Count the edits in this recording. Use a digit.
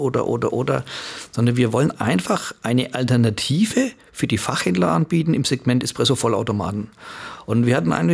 0